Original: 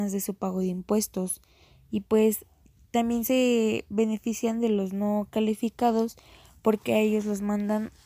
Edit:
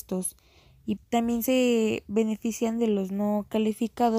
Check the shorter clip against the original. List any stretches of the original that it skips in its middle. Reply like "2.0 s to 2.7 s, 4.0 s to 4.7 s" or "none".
2.0 s to 2.8 s